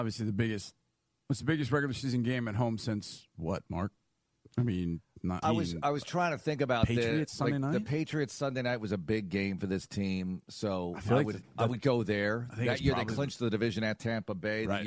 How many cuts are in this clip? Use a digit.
1